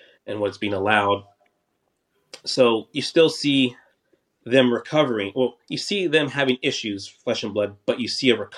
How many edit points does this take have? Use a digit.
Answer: 0